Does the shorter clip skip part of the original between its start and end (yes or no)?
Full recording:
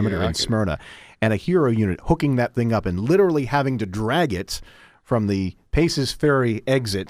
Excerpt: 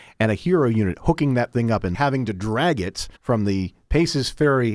yes